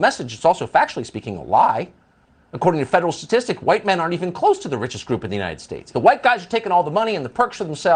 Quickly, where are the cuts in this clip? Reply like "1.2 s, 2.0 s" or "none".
5.9 s

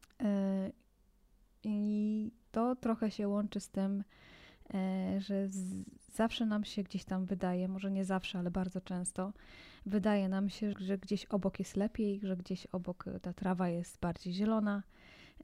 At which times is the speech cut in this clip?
10.7 s

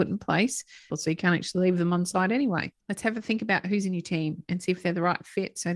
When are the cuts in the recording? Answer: 0.9 s, 2.8 s

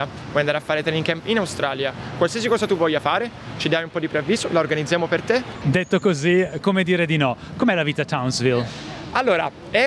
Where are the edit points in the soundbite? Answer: 5.6 s

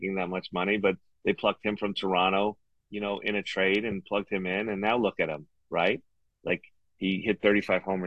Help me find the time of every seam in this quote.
2.7 s

